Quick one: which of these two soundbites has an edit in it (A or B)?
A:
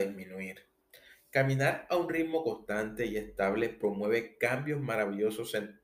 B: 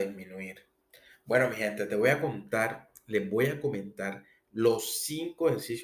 A